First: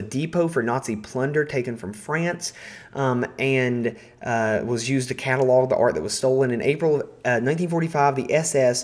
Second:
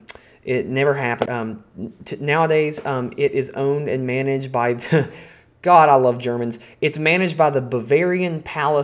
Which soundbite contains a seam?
second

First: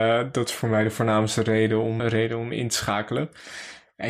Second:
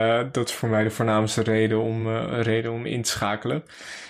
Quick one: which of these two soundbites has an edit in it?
first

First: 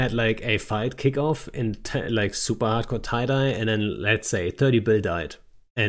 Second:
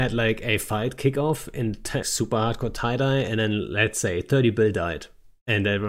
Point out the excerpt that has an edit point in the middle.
second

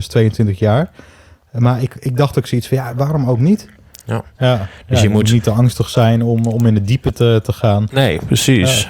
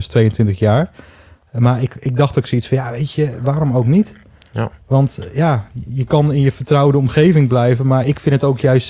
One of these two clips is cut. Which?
first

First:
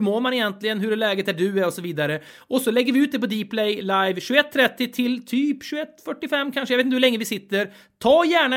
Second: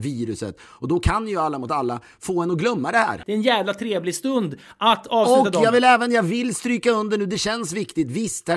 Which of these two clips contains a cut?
second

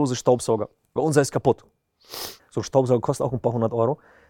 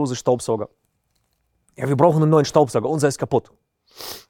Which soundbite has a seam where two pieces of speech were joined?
first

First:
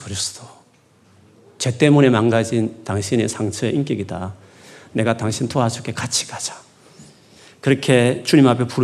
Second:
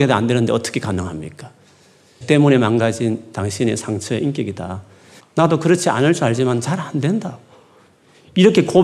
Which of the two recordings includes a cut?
second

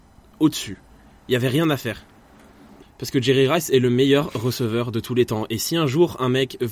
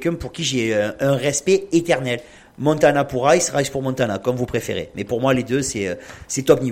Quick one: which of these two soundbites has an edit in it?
first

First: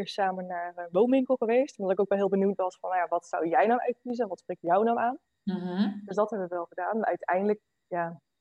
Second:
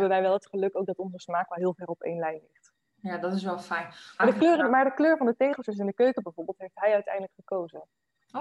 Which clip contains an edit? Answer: second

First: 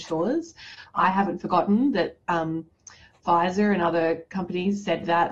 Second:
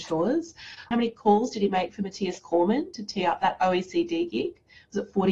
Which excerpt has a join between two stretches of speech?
second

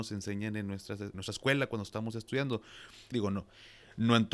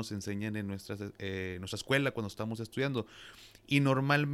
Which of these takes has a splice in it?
first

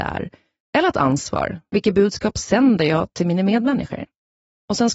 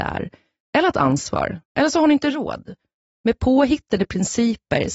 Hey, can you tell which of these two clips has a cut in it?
second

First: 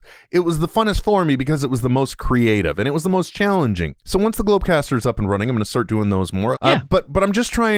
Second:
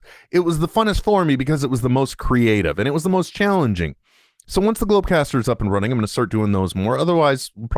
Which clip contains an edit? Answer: first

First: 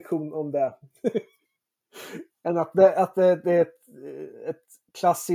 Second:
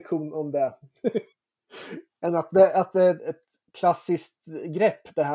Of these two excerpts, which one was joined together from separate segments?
second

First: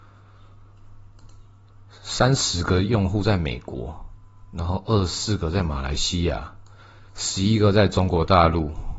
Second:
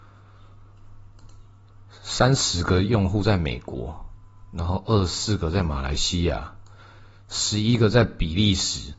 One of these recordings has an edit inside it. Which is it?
first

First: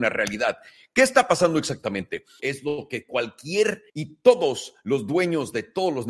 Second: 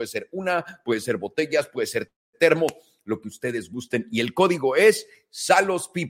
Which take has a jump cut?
first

